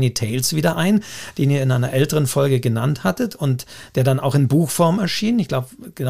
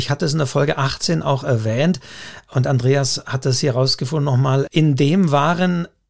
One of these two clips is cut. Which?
second; 1 cut; at 4.7 s

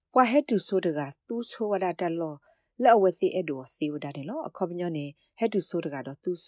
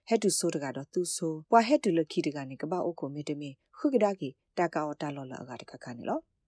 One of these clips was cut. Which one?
second; 1 cut; at 1.4 s

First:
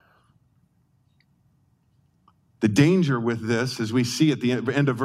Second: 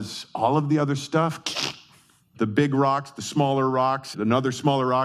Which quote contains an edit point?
second; 2 cuts; at 2.3 s, 4.1 s

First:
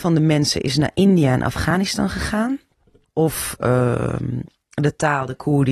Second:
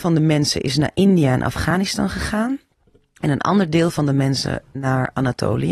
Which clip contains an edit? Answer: first; 1 cut; at 3.1 s

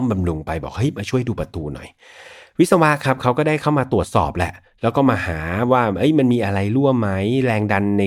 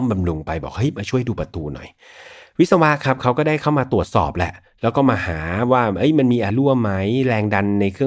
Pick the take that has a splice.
second; 1 cut; at 6.5 s

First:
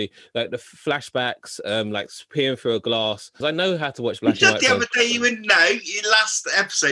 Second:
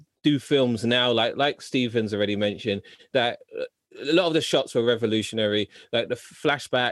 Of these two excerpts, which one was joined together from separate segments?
first; 1 cut; at 3.4 s

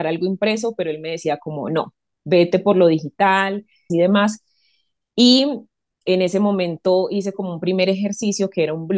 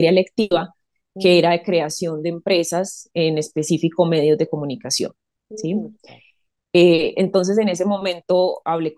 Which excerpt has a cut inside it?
first; 1 cut; at 3.9 s

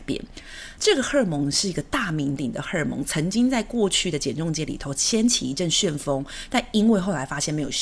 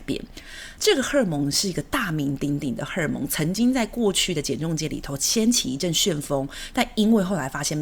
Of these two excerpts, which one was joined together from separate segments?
first; 1 cut; at 2.4 s

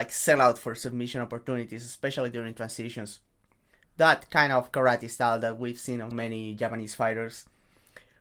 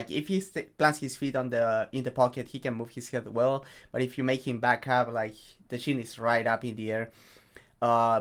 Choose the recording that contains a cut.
first; 2 cuts; at 3.8 s, 6.1 s

